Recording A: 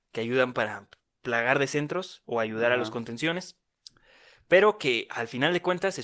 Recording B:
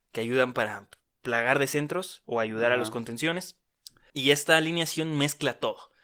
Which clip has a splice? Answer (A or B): B